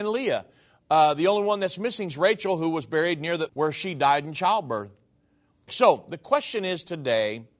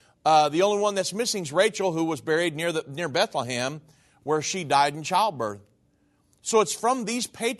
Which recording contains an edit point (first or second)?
first